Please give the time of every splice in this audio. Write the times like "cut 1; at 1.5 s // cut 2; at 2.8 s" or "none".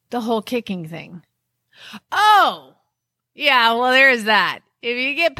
none